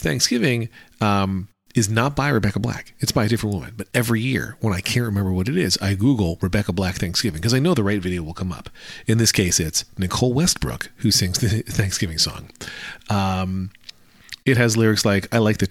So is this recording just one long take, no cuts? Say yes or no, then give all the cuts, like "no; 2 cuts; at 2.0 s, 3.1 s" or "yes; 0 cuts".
yes; 0 cuts